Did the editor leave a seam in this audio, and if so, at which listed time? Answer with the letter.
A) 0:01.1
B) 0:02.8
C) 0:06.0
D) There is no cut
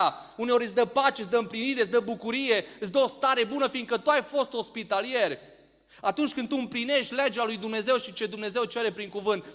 D